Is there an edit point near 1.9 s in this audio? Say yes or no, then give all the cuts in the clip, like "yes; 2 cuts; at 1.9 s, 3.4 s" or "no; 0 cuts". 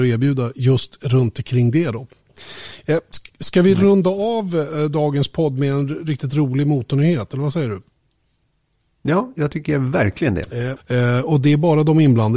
no; 1 cut; at 10.8 s